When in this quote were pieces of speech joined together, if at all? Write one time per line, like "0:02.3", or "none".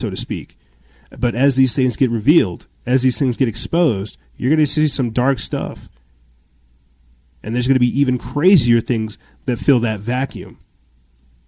none